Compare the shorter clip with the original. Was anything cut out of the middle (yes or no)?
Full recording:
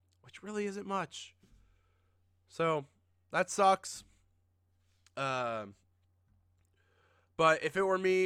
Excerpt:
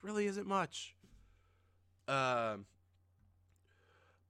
yes